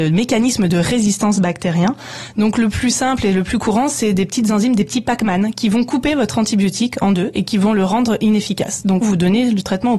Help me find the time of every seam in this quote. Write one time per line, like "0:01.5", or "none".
0:09.0